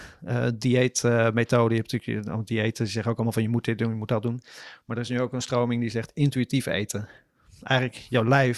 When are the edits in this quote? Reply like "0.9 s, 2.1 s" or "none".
none